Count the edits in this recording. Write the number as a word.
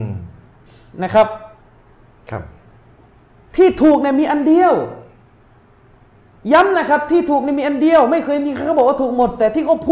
zero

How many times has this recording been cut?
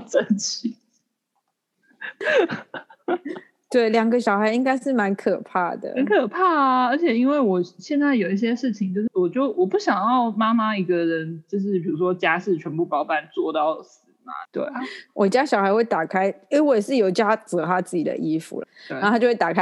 three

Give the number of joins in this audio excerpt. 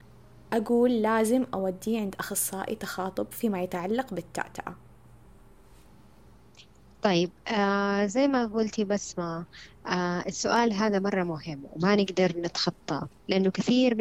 zero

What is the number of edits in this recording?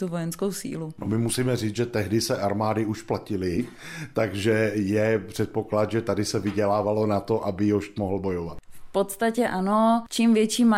one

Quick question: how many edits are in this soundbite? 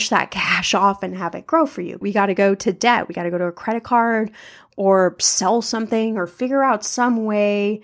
one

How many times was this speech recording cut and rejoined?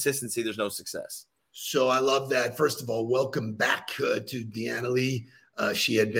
zero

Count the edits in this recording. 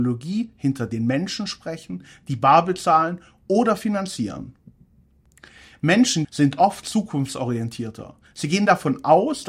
one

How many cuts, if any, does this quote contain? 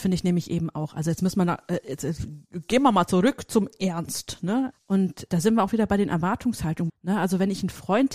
two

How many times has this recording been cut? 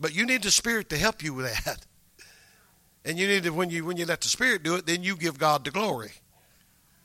zero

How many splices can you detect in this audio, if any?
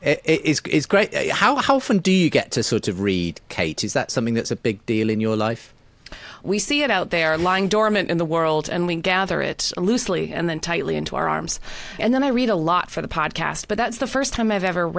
two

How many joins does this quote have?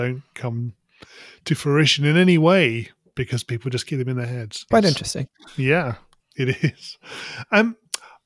two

